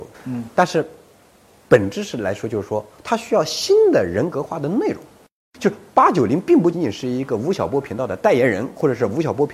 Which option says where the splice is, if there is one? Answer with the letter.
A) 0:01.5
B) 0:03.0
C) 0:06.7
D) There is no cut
C